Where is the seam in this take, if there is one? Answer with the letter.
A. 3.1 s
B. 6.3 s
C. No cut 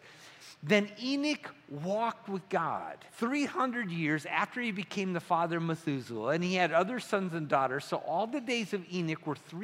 A